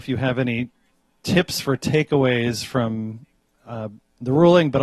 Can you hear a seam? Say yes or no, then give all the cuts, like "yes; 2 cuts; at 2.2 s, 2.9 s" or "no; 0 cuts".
yes; 1 cut; at 3.5 s